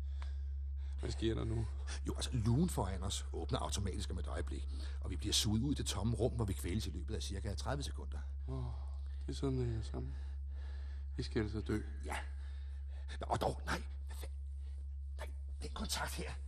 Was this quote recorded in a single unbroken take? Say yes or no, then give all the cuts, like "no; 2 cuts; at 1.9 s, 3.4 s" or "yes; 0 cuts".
yes; 0 cuts